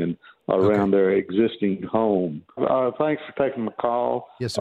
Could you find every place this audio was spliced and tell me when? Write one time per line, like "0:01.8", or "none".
0:02.6